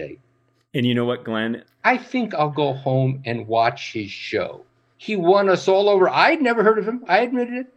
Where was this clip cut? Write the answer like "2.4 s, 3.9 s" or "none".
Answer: 1.6 s, 4.9 s